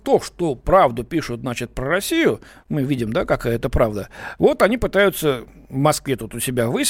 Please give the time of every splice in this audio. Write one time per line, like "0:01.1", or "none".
none